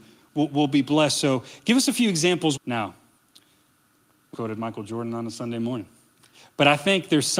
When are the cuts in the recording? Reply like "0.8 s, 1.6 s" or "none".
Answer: 2.6 s, 4.3 s